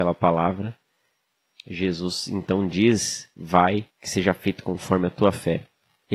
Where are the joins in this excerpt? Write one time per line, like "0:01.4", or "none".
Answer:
0:03.9